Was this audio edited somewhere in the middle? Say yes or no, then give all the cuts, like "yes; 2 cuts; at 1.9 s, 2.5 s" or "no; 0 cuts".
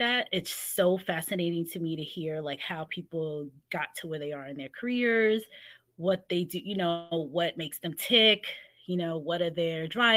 no; 0 cuts